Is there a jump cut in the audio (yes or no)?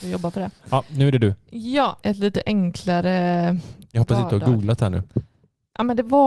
yes